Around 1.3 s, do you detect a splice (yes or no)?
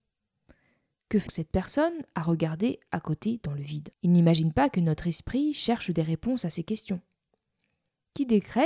yes